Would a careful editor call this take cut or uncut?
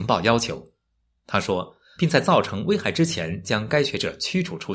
cut